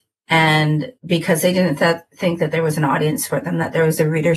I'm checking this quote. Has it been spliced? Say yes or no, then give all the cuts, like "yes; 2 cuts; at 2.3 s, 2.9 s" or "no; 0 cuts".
yes; 1 cut; at 1.0 s